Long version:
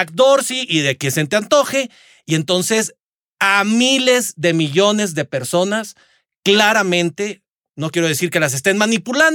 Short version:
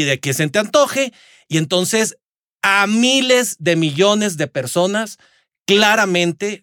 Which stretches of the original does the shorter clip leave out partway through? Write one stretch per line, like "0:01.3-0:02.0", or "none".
none